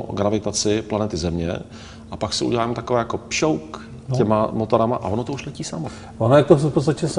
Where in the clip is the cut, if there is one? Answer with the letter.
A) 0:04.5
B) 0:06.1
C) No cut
C